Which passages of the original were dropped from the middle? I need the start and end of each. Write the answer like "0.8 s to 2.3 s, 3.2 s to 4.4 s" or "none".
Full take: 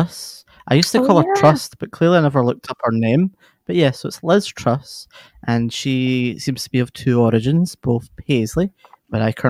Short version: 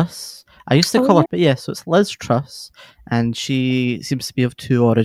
1.3 s to 3.6 s